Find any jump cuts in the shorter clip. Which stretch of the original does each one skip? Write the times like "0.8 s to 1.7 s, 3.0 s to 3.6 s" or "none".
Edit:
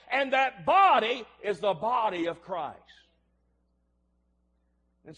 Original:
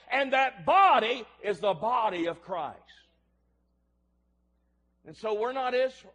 none